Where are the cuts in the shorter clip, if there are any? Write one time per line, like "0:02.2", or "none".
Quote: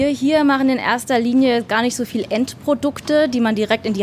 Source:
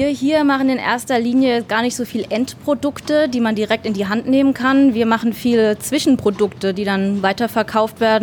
none